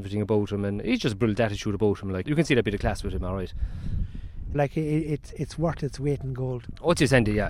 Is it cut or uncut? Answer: cut